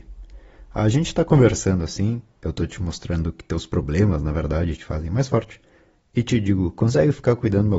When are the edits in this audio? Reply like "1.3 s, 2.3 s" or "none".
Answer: none